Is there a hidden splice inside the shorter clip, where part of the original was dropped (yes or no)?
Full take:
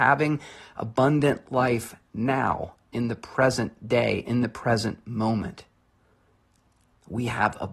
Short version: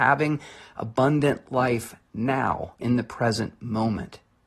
yes